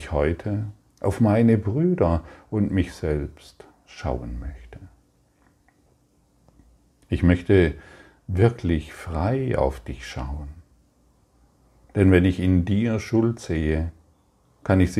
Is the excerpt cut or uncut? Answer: uncut